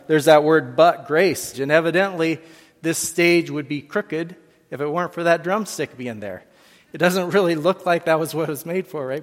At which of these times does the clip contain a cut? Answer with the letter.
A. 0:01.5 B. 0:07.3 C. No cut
A